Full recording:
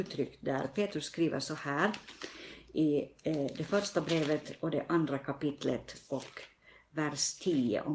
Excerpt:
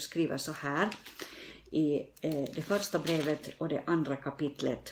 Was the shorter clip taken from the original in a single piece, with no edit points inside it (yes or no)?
yes